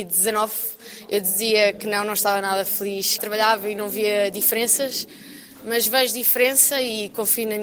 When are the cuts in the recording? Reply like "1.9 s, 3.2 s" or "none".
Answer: 3.2 s